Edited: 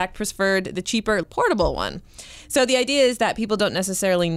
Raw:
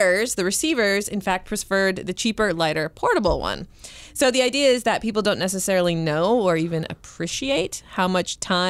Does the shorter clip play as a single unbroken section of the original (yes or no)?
no